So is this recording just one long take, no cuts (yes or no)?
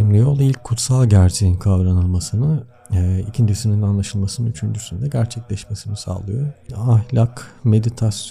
yes